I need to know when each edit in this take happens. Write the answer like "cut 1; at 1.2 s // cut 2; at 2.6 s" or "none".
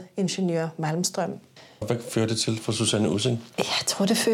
cut 1; at 1.8 s